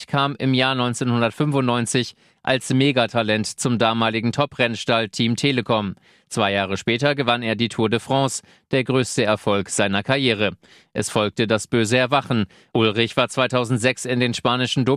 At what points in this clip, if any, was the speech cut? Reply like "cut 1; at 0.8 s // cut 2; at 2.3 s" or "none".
none